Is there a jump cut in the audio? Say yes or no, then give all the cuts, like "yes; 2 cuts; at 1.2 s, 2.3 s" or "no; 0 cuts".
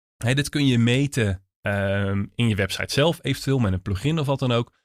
no; 0 cuts